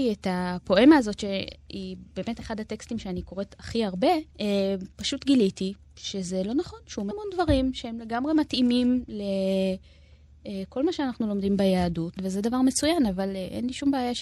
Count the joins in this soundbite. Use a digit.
3